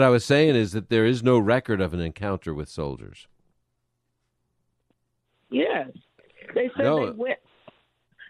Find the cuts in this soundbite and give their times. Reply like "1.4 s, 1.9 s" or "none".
none